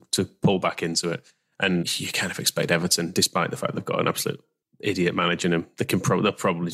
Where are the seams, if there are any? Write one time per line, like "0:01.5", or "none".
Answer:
0:01.8